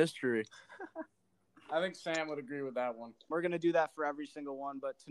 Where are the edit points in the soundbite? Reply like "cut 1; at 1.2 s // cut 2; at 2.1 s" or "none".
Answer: cut 1; at 3.3 s

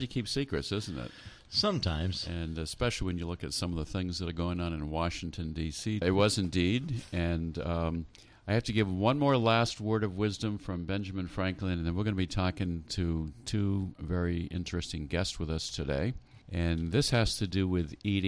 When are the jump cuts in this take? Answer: cut 1; at 6.0 s // cut 2; at 16.4 s

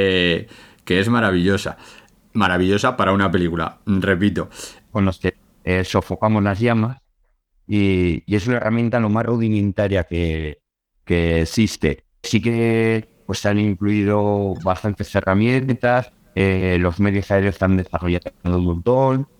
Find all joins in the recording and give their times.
cut 1; at 4.9 s // cut 2; at 12.2 s

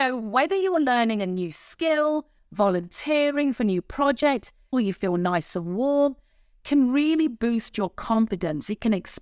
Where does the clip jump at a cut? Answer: cut 1; at 2.4 s // cut 2; at 4.7 s

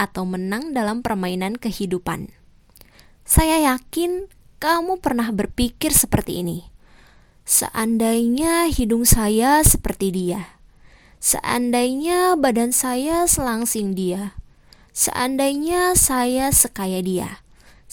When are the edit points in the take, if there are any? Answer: none

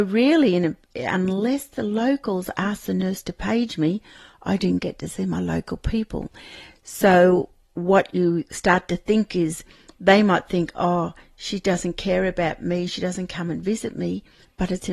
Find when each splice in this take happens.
none

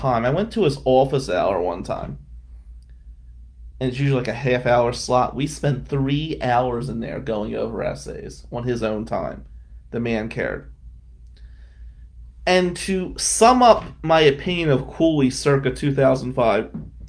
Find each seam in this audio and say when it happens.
none

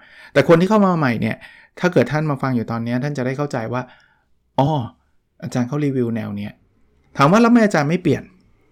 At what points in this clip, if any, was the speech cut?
none

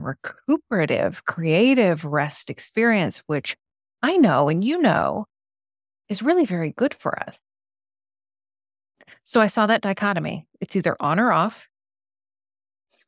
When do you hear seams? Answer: none

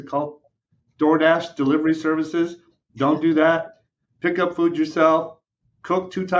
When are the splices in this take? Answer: none

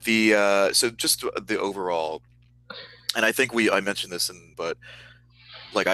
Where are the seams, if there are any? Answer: cut 1; at 4.5 s

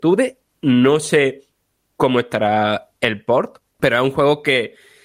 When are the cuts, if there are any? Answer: cut 1; at 3.7 s

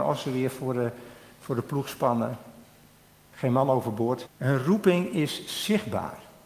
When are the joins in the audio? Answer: cut 1; at 4.3 s

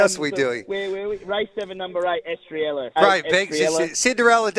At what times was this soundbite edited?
cut 1; at 3.0 s

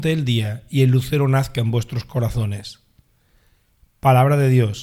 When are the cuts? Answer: none

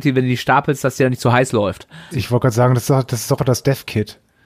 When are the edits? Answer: cut 1; at 2.1 s // cut 2; at 3.4 s

